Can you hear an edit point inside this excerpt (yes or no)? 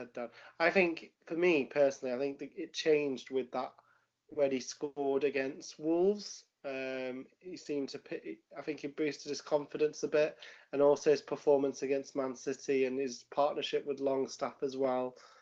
no